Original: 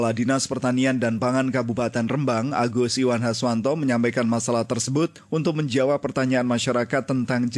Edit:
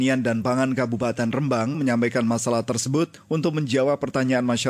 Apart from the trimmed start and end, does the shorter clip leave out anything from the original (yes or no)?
yes